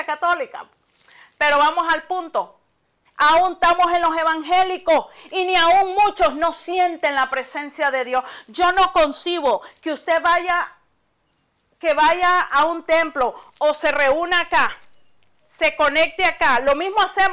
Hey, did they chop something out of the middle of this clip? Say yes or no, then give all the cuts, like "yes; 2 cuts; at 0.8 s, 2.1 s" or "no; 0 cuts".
yes; 1 cut; at 3.1 s